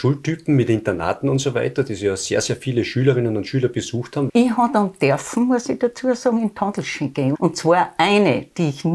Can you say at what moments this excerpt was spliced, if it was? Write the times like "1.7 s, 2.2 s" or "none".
4.3 s, 7.3 s